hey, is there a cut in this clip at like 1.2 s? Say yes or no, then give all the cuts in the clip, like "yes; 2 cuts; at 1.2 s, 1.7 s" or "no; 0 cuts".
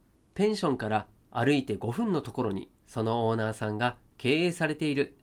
no; 1 cut; at 2.8 s